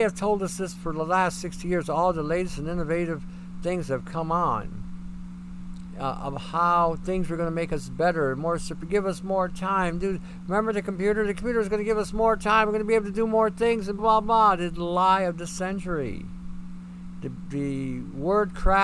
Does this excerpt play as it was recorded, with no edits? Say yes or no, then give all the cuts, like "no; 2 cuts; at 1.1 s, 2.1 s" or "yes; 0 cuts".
no; 1 cut; at 14.0 s